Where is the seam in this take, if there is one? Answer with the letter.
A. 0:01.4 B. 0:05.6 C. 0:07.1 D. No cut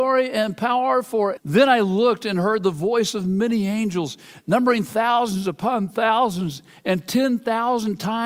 A